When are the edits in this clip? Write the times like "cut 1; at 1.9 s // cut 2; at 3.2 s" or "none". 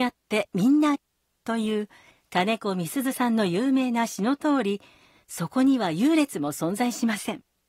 cut 1; at 0.9 s